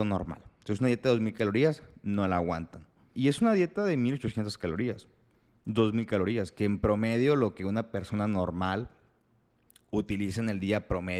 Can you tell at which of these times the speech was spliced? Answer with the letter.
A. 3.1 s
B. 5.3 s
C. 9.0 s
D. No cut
A